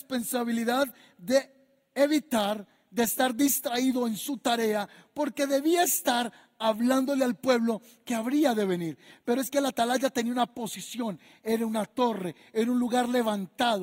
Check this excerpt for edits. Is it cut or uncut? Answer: uncut